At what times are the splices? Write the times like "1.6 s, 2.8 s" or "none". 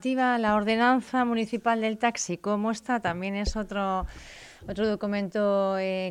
none